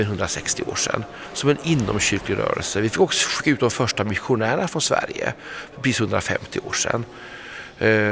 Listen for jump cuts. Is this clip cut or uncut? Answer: uncut